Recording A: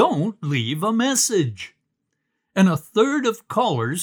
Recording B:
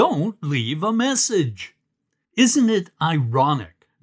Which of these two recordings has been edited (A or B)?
B